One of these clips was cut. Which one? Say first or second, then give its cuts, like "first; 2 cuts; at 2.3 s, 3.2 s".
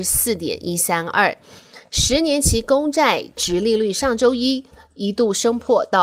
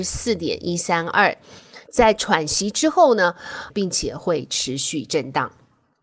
second; 2 cuts; at 1.9 s, 3.7 s